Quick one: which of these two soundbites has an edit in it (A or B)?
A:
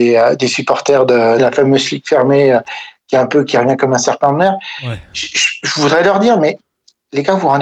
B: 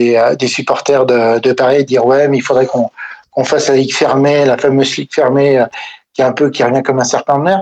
A